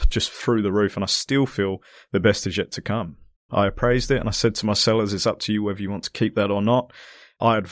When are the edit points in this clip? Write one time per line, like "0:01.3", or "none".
0:03.5